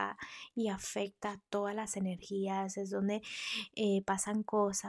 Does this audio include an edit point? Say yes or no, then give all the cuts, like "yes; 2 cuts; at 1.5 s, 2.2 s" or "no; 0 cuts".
no; 0 cuts